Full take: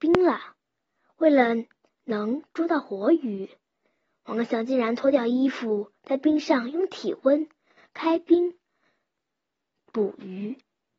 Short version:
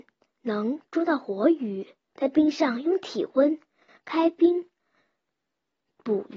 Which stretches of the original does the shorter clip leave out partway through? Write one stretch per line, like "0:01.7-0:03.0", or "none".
0:03.7-0:06.0